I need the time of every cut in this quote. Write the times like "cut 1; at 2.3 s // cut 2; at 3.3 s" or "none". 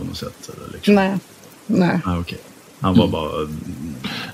none

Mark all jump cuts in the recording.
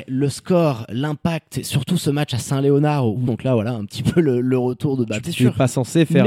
cut 1; at 3.3 s // cut 2; at 5.2 s

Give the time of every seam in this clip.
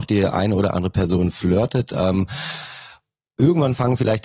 none

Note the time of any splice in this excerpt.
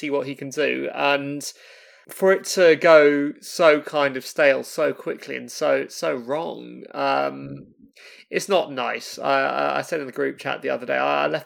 none

